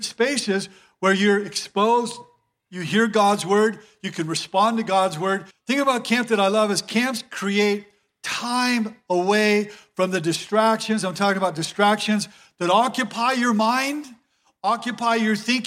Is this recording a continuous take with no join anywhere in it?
no; 1 cut; at 5.5 s

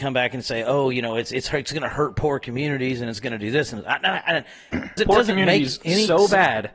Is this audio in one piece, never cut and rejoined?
no; 1 cut; at 5.0 s

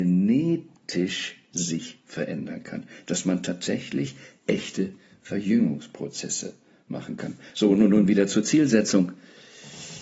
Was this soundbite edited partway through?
no; 0 cuts

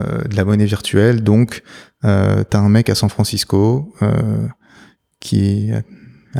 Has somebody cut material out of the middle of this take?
no; 0 cuts

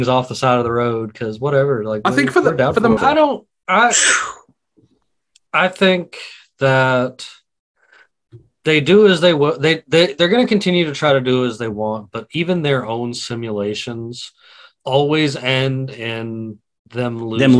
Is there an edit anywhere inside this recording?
yes; 1 cut; at 3.0 s

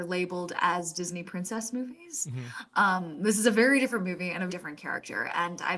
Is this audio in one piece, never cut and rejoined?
no; 1 cut; at 4.5 s

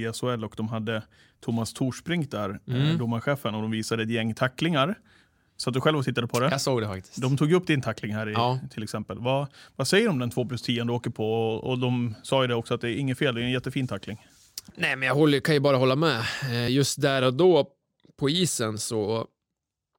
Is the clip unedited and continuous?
yes; 0 cuts

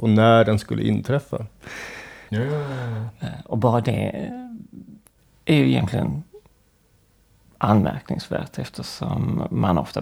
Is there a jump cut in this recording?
yes; 1 cut; at 2.3 s

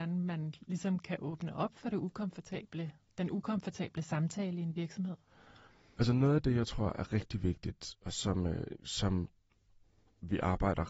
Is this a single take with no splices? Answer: yes; 0 cuts

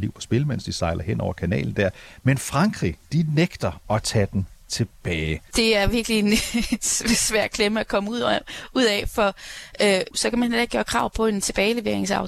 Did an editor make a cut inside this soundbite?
yes; 2 cuts; at 5.5 s, 10.1 s

